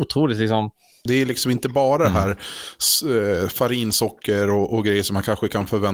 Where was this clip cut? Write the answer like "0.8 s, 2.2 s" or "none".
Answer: 1.1 s